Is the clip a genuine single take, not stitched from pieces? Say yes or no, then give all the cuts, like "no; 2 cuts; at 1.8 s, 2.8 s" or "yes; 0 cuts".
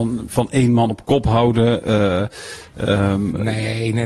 yes; 0 cuts